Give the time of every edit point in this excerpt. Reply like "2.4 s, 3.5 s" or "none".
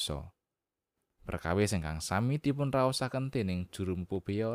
1.1 s